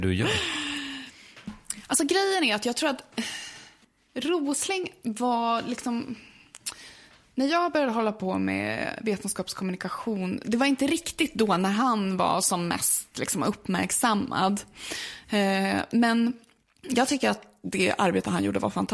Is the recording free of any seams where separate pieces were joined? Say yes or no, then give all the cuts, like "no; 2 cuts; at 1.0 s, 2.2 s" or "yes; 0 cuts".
yes; 0 cuts